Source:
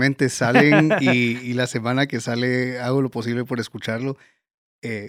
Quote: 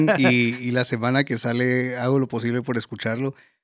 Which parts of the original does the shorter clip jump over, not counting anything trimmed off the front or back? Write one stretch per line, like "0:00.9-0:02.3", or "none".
none

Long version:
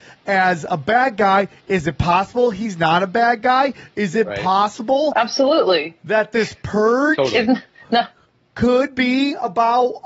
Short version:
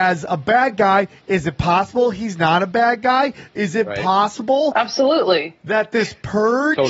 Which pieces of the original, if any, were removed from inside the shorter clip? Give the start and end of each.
none

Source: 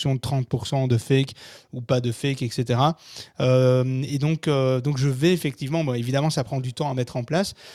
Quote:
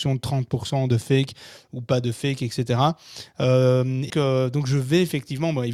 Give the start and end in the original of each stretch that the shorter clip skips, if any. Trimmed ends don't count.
0:04.1-0:04.4

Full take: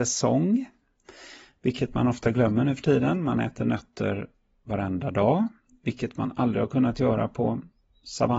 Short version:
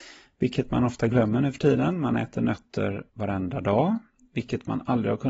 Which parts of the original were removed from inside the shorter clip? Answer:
0:04.3-0:04.6

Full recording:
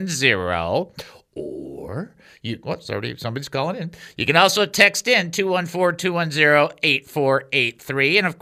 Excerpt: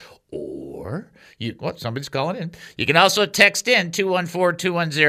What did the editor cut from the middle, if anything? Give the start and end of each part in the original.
0:02.8-0:03.2

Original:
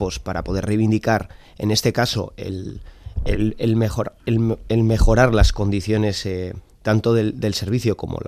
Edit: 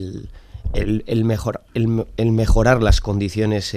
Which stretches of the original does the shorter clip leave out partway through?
none

